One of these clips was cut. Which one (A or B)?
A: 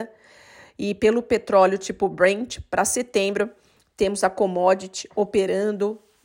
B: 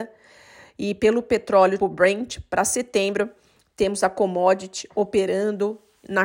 B